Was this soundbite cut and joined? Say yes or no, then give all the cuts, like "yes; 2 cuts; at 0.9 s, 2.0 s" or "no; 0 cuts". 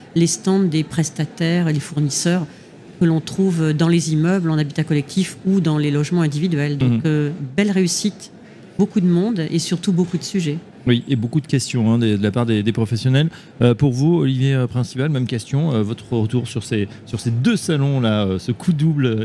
no; 0 cuts